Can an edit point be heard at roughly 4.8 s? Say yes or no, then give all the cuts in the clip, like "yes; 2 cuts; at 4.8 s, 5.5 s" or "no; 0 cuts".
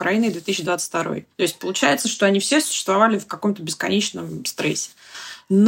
no; 1 cut; at 1.3 s